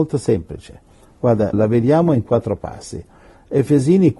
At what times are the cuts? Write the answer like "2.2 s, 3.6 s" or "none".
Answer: 1.5 s